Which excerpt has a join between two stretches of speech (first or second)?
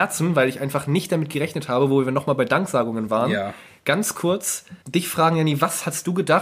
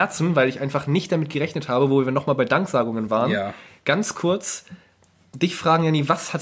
first